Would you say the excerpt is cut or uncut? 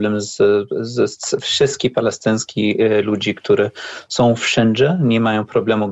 uncut